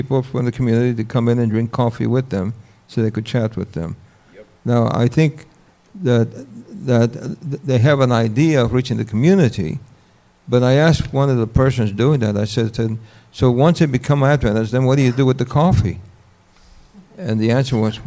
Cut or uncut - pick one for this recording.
uncut